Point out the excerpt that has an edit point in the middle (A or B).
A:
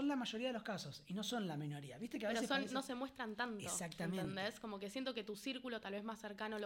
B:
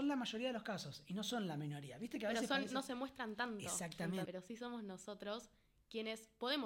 B